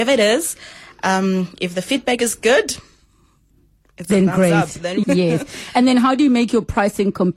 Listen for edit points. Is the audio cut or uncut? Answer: cut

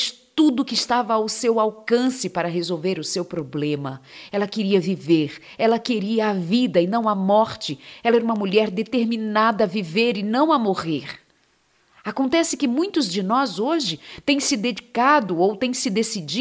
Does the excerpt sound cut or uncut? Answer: cut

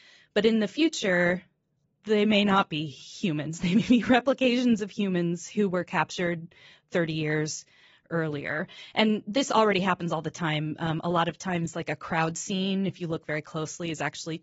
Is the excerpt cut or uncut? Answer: uncut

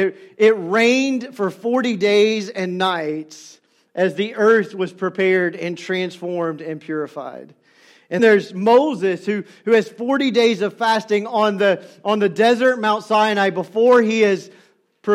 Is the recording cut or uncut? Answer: cut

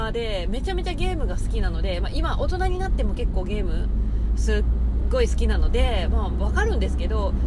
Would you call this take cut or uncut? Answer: uncut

